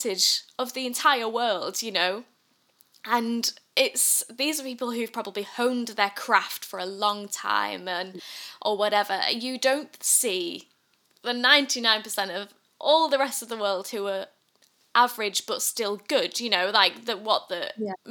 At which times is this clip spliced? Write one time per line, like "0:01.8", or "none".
none